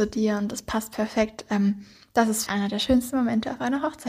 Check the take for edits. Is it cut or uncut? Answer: cut